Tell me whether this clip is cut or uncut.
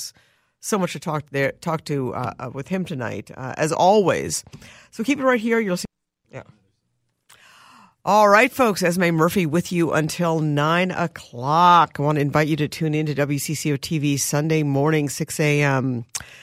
uncut